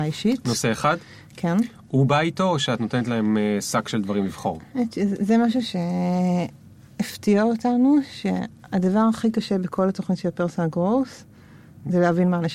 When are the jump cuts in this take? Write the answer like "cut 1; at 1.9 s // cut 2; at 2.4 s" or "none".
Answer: none